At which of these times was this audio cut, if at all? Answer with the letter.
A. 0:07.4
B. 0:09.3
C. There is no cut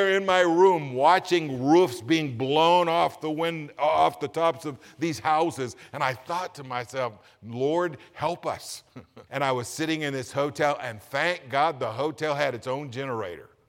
B